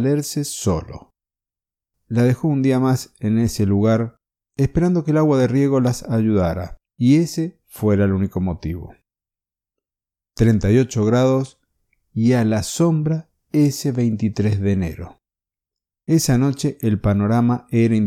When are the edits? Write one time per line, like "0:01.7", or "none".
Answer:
0:06.9